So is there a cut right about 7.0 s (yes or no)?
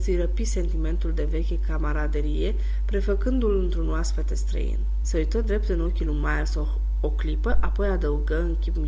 no